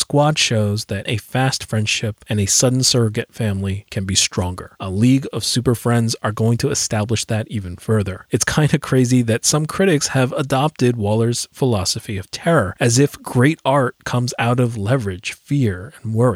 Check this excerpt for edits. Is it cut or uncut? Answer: cut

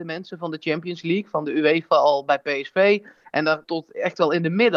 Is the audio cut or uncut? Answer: cut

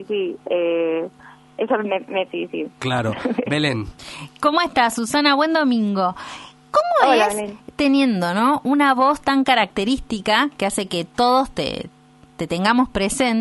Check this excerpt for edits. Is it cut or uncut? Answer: cut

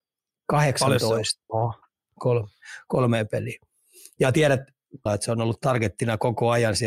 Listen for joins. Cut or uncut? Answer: cut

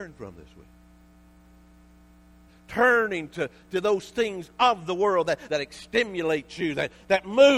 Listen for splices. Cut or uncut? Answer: cut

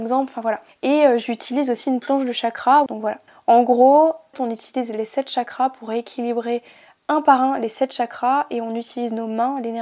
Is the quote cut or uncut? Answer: cut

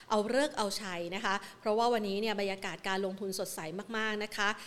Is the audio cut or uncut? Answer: uncut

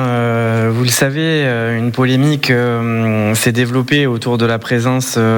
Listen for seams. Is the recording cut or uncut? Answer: uncut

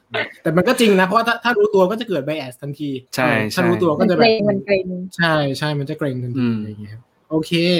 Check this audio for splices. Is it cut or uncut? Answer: cut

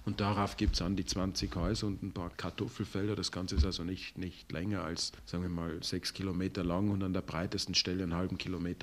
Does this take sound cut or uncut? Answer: uncut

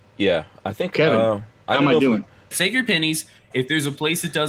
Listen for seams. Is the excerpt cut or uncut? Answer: cut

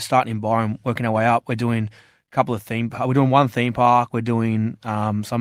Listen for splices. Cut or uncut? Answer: uncut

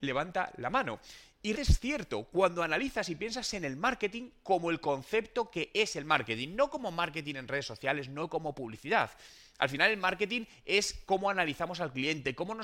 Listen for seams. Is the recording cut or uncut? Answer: cut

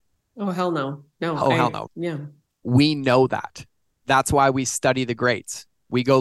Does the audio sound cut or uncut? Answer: cut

